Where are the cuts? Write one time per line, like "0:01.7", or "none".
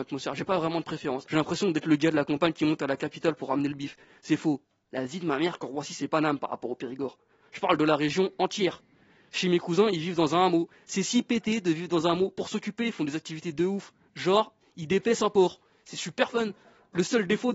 0:01.2
0:04.9